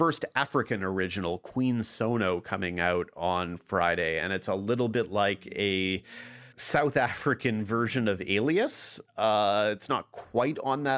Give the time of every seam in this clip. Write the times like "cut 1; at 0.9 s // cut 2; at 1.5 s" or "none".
cut 1; at 6.5 s